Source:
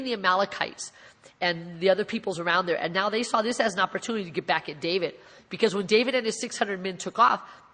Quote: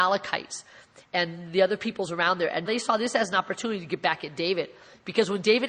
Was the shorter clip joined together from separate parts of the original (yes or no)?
yes